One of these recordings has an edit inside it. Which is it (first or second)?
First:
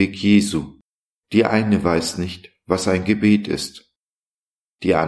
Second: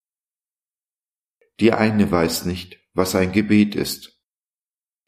first